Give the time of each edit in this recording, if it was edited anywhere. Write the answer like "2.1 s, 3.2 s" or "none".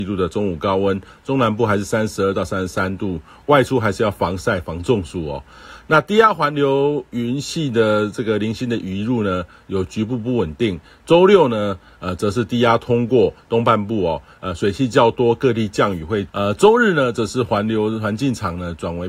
16.3 s